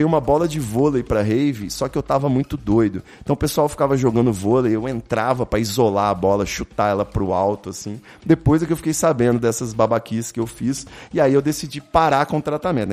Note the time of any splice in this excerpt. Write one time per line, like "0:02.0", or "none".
none